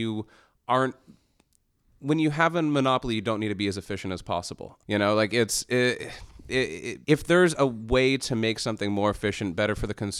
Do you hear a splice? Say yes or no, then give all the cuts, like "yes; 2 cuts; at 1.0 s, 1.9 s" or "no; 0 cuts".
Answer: yes; 2 cuts; at 4.8 s, 7.0 s